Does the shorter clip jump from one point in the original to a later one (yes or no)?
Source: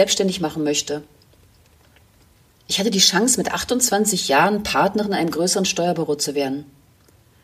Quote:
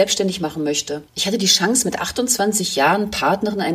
yes